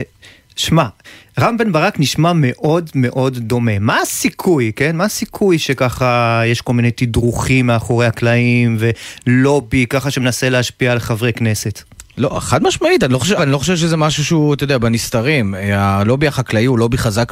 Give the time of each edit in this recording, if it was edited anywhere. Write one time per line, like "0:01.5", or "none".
0:13.4